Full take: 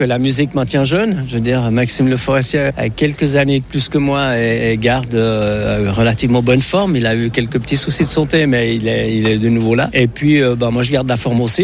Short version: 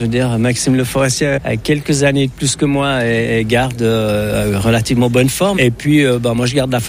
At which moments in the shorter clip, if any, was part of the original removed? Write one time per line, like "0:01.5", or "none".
0:05.6